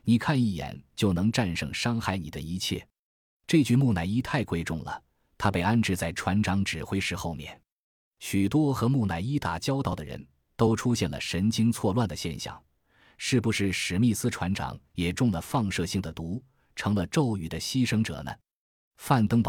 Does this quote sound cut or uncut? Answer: uncut